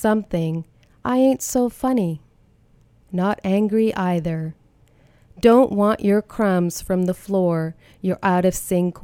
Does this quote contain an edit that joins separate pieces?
no; 0 cuts

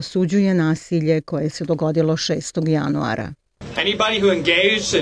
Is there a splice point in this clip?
no; 0 cuts

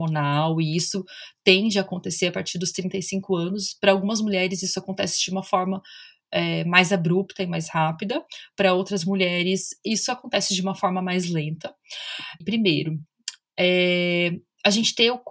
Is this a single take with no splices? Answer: no; 1 cut; at 12.4 s

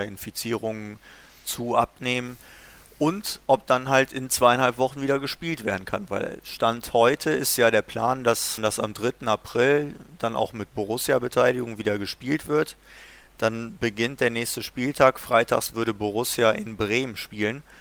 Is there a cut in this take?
yes; 1 cut; at 8.6 s

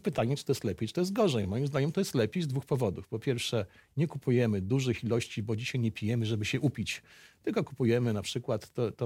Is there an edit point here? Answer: no; 0 cuts

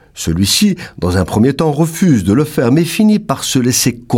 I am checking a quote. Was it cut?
no; 0 cuts

